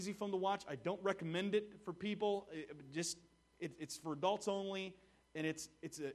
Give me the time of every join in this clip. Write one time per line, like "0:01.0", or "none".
none